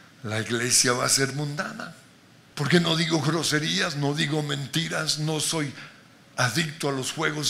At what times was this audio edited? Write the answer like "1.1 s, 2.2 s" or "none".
2.5 s